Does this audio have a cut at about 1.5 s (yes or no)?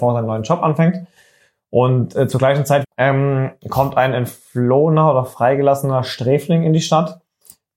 no